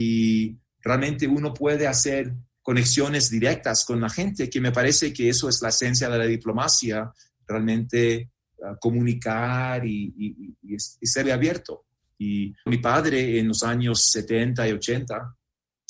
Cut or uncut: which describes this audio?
cut